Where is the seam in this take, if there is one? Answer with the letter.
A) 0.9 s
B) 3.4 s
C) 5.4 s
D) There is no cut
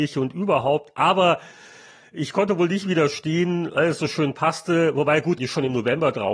C